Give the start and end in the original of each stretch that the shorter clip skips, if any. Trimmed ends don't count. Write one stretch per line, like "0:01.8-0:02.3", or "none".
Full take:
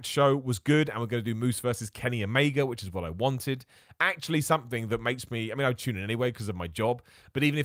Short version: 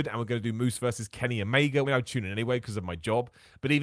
0:02.7-0:05.6